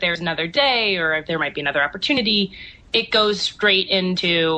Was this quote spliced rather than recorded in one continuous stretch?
no; 0 cuts

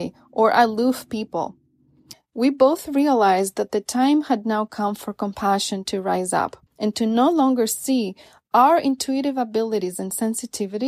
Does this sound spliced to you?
yes; 2 cuts; at 2.1 s, 6.7 s

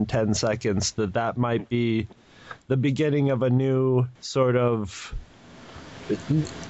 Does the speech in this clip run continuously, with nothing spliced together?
no; 1 cut; at 4.1 s

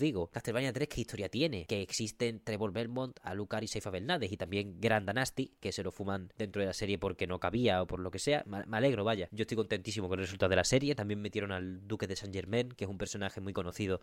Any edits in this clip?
no; 0 cuts

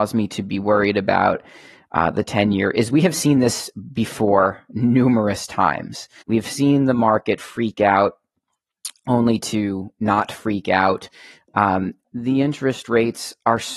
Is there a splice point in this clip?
yes; 2 cuts; at 6.2 s, 12.0 s

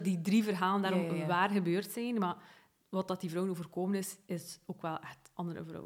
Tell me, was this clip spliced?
no; 0 cuts

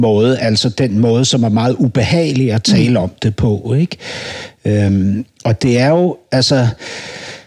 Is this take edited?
no; 0 cuts

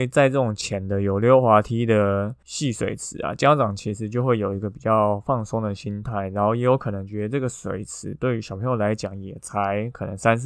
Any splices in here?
no; 0 cuts

